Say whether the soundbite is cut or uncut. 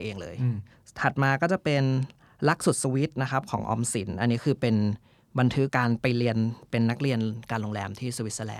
cut